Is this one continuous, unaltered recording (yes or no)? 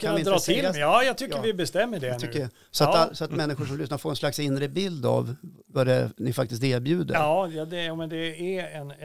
yes